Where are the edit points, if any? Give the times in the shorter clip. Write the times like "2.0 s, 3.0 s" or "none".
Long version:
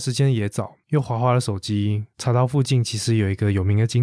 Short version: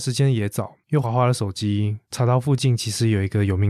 1.0 s